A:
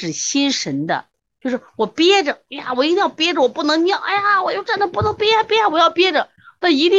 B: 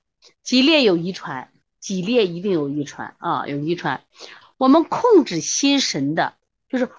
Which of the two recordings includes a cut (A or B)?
B